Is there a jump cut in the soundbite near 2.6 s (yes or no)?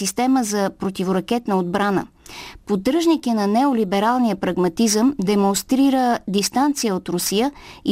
yes